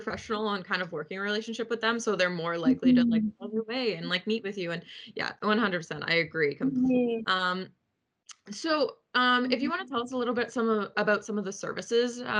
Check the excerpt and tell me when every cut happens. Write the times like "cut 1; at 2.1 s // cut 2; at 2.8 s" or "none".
cut 1; at 7.2 s